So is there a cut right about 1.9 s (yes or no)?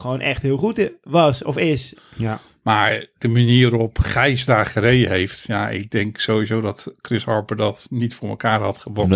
yes